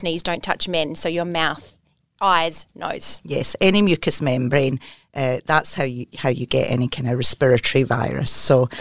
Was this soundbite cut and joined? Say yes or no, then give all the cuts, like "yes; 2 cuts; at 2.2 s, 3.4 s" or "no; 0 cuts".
no; 0 cuts